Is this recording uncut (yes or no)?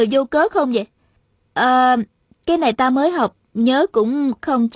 yes